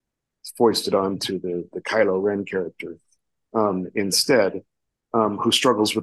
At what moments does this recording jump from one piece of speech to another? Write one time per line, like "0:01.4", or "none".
none